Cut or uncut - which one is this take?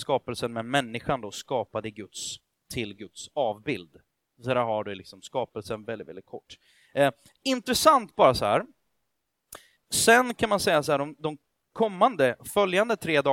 cut